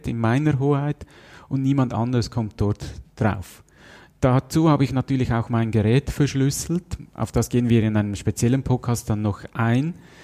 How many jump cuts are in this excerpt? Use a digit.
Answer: 0